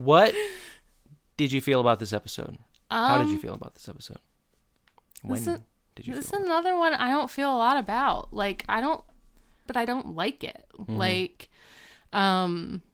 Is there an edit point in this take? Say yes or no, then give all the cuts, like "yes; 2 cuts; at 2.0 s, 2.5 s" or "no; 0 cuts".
yes; 2 cuts; at 9.7 s, 10.8 s